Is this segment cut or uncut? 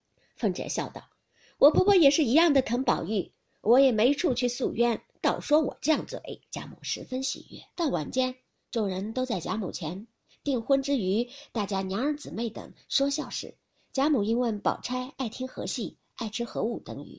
cut